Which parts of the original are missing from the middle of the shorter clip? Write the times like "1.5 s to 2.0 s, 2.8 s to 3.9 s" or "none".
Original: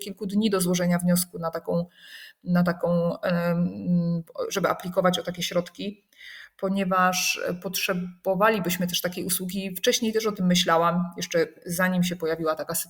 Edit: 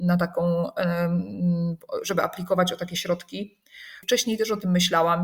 6.5 s to 9.8 s